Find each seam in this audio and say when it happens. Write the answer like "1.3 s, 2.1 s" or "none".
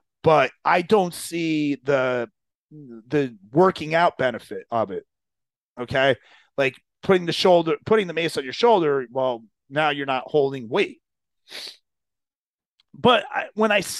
none